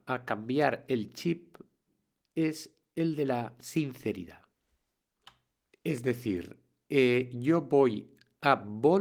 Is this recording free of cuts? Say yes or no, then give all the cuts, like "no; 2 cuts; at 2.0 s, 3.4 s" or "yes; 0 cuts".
yes; 0 cuts